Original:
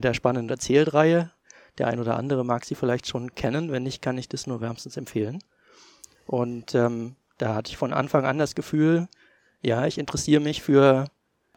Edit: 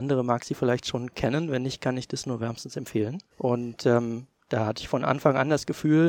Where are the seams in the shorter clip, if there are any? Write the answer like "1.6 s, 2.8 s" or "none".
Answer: 3.3 s